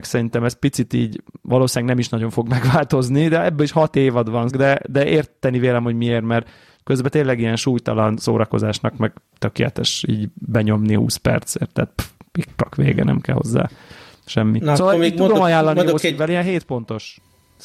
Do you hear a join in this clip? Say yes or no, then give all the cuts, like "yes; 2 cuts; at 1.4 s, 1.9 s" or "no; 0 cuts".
yes; 1 cut; at 4.5 s